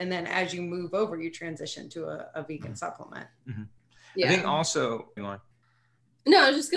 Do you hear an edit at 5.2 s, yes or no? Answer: yes